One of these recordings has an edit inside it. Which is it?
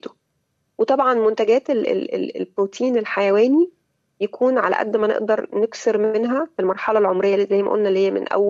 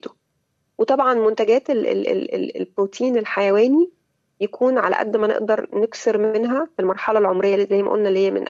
first; 1 cut; at 1.8 s

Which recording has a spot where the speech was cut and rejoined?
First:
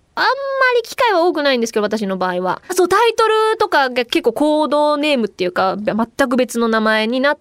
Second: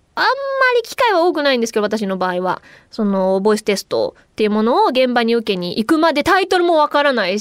first; 1 cut; at 2.7 s

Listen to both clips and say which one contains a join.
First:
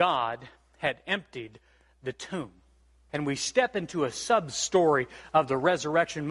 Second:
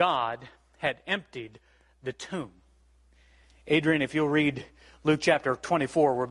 first; 1 cut; at 3.1 s

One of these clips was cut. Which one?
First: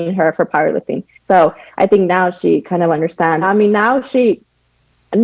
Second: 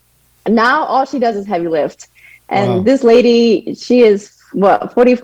first; 2 cuts; at 1.1 s, 3.4 s

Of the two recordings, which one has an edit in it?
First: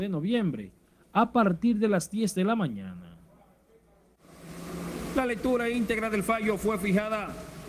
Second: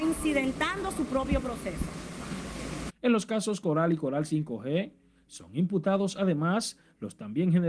second; 1 cut; at 2.9 s

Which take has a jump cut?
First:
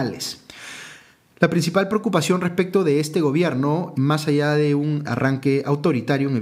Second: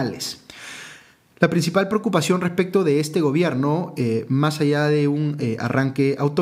first; 2 cuts; at 3.9 s, 5.0 s

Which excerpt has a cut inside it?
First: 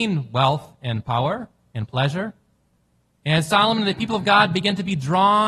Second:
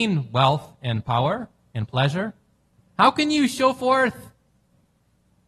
second; 1 cut; at 2.8 s

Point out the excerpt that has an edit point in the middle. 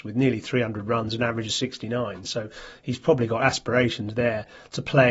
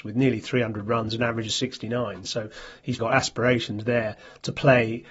second; 1 cut; at 3.0 s

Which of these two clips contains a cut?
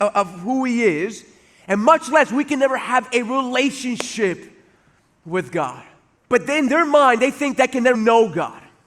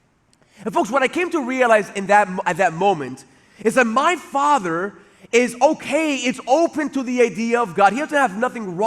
first; 2 cuts; at 6.2 s, 7.9 s

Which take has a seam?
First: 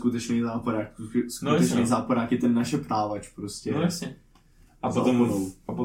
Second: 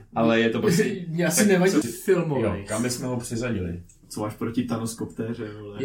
second; 1 cut; at 1.8 s

